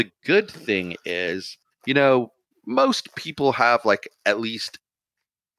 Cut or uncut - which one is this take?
uncut